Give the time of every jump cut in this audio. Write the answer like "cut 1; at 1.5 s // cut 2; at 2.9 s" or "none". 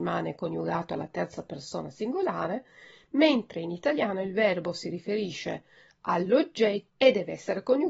cut 1; at 6.9 s